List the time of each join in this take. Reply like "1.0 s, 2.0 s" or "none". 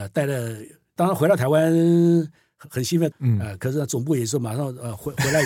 1.0 s, 3.1 s